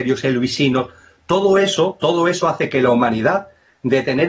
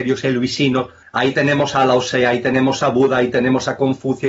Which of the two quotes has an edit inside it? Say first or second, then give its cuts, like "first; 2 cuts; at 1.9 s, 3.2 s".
second; 1 cut; at 1.0 s